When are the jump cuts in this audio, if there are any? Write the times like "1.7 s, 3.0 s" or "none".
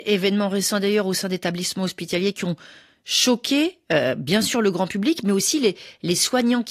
none